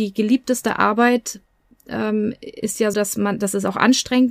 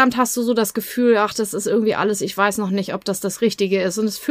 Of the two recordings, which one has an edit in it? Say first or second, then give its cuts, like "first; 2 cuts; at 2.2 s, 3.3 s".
first; 1 cut; at 2.9 s